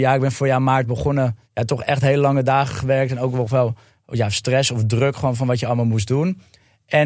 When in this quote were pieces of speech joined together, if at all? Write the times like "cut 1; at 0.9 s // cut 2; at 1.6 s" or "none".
cut 1; at 1.4 s